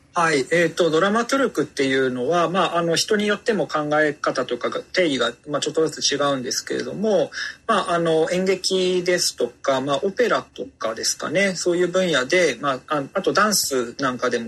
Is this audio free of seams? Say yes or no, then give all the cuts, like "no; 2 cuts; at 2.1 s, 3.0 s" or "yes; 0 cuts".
yes; 0 cuts